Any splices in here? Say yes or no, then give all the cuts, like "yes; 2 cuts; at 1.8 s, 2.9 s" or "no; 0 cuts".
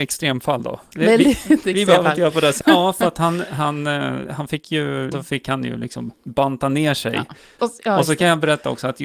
yes; 3 cuts; at 2.6 s, 5.1 s, 7.6 s